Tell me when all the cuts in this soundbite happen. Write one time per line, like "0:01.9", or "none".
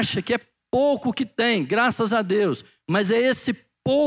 none